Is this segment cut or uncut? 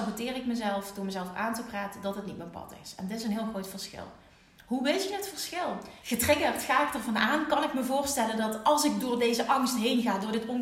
cut